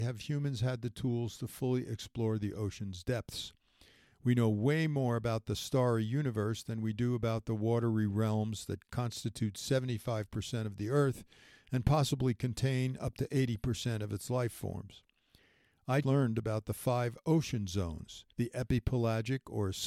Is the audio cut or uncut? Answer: cut